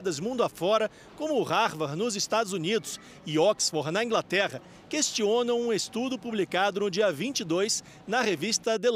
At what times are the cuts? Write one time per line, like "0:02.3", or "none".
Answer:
none